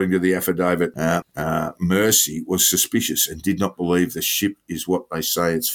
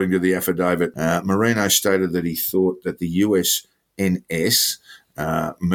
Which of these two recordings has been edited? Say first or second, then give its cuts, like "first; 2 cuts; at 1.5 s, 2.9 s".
first; 1 cut; at 1.2 s